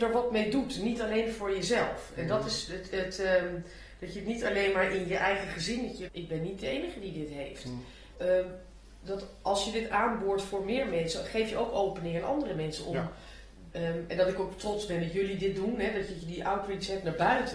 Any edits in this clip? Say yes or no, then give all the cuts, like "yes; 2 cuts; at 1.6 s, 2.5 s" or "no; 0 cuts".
yes; 3 cuts; at 6.1 s, 8.1 s, 13.7 s